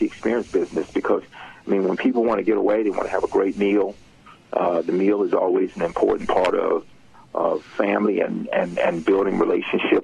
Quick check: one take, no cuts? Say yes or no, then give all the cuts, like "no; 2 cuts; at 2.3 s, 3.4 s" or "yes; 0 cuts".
yes; 0 cuts